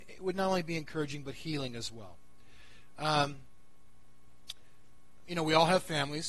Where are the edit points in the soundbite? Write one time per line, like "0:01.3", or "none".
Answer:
none